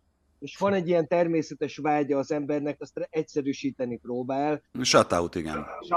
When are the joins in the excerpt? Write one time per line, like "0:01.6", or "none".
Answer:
0:02.8
0:04.7